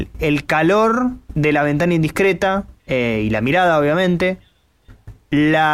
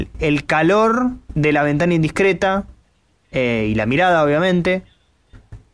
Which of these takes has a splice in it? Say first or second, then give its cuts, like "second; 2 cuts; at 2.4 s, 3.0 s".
first; 1 cut; at 2.8 s